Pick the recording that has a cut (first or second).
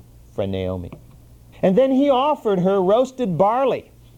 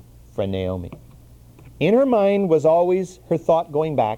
first